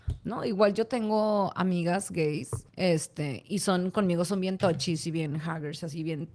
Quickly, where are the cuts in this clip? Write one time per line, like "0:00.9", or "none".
0:02.7